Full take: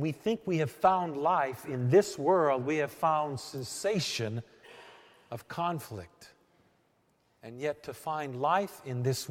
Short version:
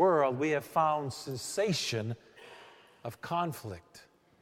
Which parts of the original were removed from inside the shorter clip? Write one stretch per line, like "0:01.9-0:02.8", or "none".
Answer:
none